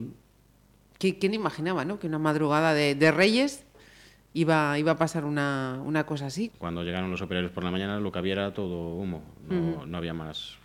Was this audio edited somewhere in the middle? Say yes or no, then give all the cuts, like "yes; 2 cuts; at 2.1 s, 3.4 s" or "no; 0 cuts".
yes; 1 cut; at 6.5 s